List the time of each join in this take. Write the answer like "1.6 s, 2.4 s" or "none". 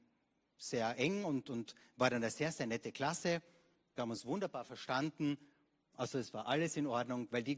none